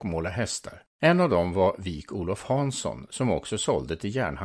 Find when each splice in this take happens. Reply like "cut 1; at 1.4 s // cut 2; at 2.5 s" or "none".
cut 1; at 0.9 s